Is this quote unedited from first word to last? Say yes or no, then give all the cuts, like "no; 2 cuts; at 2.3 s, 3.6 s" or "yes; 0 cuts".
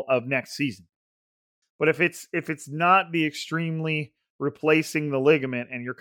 no; 1 cut; at 1.6 s